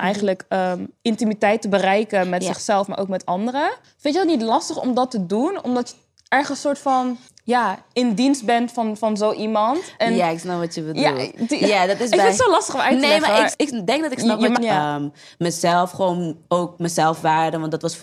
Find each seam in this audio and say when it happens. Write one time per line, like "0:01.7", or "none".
0:13.5
0:14.6